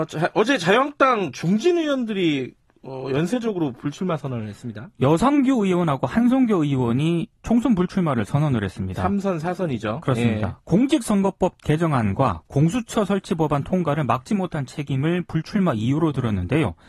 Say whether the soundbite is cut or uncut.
uncut